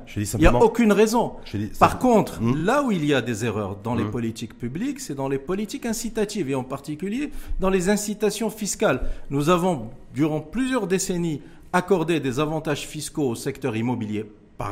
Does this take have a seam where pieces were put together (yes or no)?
no